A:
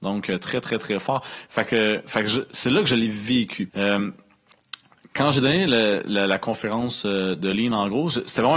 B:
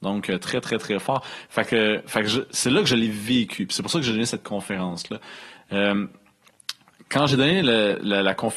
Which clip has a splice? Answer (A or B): A